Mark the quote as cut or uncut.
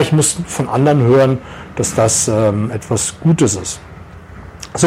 uncut